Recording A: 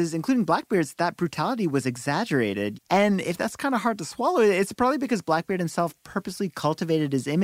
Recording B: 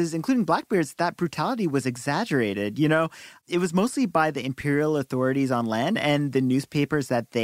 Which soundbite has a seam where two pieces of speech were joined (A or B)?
A